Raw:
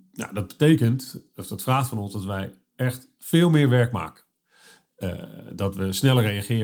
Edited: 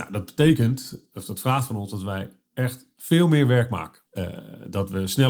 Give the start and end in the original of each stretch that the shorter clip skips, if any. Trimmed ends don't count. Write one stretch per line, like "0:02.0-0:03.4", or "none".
0:04.3-0:04.9